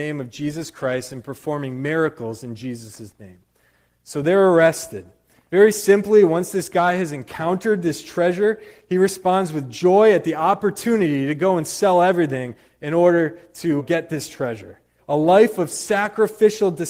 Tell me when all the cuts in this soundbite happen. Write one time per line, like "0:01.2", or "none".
0:05.5
0:13.8
0:15.0